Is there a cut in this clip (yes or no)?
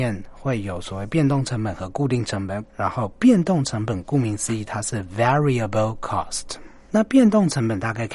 yes